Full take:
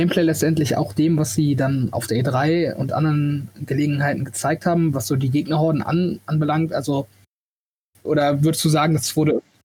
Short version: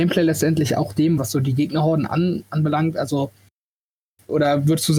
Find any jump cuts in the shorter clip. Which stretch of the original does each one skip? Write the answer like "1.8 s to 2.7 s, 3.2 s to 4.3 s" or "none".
1.2 s to 4.9 s